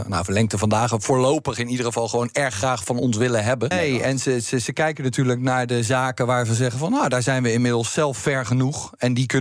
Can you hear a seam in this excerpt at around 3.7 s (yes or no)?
yes